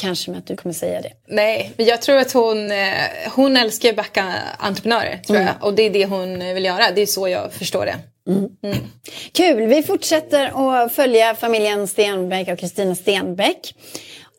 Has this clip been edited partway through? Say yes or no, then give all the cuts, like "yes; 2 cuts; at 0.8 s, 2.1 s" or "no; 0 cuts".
no; 0 cuts